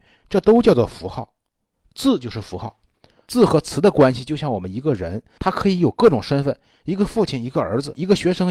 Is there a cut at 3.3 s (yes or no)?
yes